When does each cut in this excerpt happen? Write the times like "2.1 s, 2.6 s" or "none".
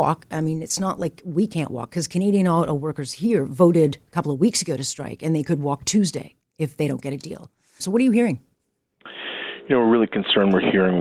7.8 s